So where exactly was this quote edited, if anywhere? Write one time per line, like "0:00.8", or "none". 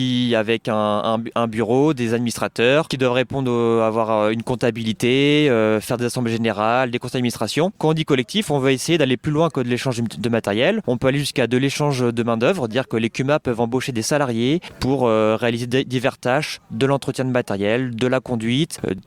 0:07.7